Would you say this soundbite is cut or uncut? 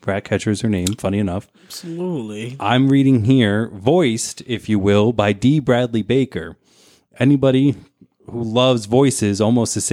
uncut